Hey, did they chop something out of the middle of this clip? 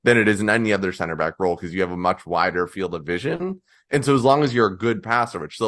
no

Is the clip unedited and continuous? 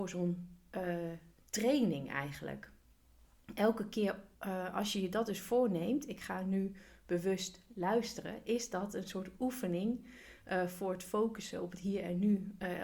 no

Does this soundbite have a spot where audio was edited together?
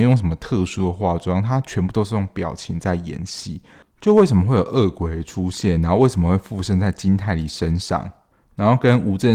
yes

